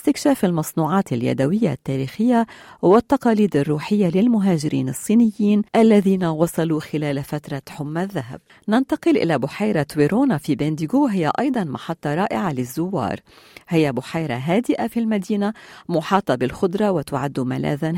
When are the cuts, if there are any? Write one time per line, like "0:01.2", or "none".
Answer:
0:05.7